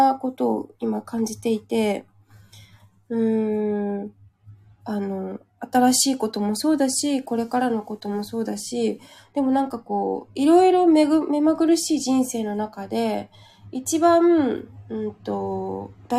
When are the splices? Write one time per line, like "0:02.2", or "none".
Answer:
none